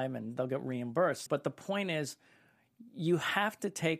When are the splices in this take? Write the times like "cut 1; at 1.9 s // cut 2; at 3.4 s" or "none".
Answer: cut 1; at 1.3 s